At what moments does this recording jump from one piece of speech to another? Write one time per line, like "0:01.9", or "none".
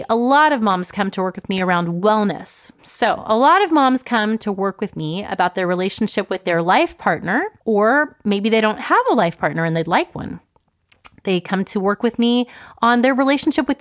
0:02.8
0:07.6